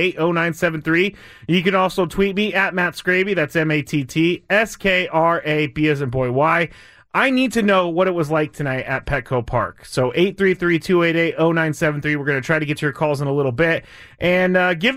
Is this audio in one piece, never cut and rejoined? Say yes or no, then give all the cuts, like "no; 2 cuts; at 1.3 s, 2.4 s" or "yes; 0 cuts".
yes; 0 cuts